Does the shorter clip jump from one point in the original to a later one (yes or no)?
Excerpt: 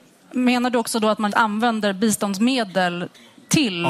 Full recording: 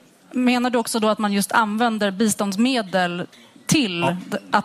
yes